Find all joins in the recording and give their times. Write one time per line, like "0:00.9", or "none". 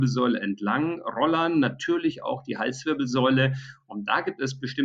none